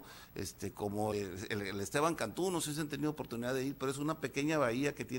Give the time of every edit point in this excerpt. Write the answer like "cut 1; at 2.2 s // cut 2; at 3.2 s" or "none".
cut 1; at 1.1 s